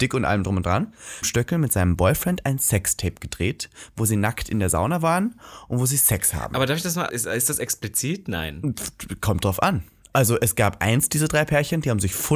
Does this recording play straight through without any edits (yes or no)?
no